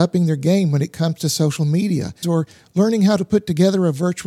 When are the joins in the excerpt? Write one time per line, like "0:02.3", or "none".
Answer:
0:02.2